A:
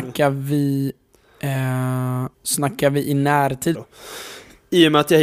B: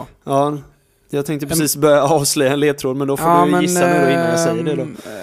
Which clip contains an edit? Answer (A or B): A